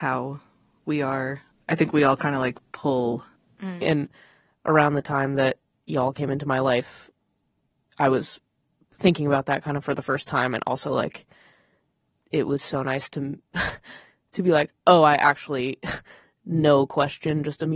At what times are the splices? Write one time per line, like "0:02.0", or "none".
0:03.8
0:14.8